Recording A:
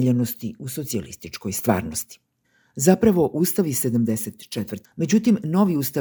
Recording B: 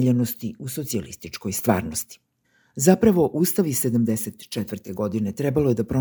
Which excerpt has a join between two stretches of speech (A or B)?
A